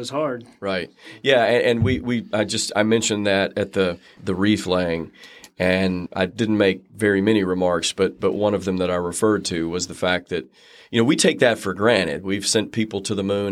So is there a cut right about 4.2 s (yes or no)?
yes